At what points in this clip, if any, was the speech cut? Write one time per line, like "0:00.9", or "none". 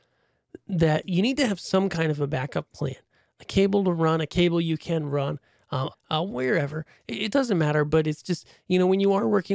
0:05.9